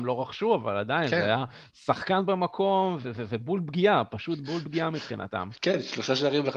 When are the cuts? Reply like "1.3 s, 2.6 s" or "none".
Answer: 3.0 s